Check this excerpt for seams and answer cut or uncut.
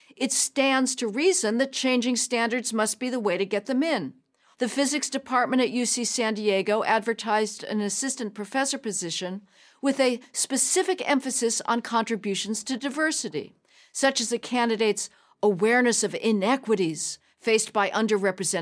cut